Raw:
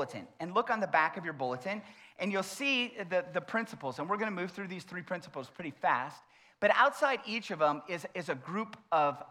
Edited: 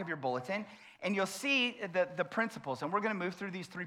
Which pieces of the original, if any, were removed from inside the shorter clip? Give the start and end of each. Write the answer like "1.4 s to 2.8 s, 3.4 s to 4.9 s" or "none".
none